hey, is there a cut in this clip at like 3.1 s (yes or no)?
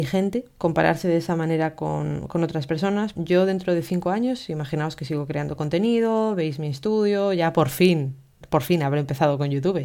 yes